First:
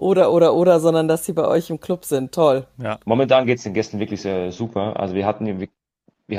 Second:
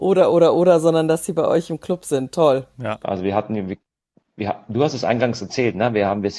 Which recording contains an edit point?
second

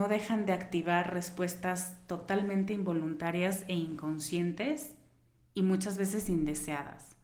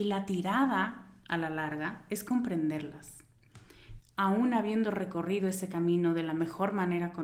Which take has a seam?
second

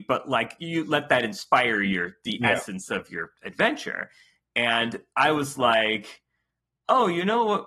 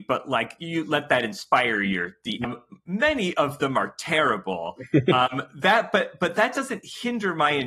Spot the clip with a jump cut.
second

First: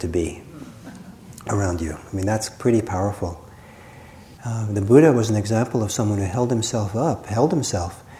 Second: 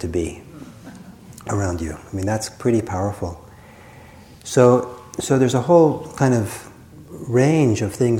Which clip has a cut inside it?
first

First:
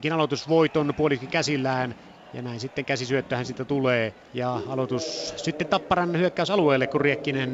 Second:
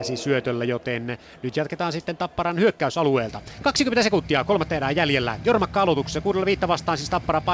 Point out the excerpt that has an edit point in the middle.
first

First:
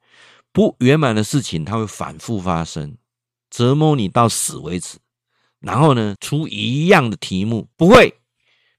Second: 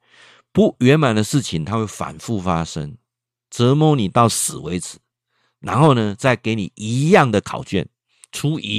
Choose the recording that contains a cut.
first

